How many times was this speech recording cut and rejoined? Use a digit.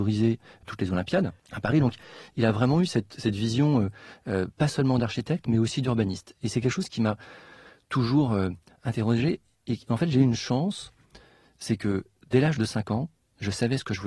1